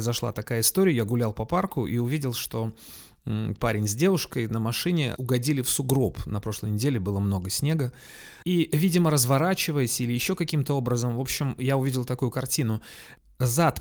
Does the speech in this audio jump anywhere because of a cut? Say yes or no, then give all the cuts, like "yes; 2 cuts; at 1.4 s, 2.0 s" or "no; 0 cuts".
yes; 1 cut; at 5.2 s